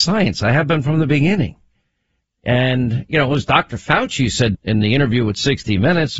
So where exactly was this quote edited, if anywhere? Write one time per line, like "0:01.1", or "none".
0:04.5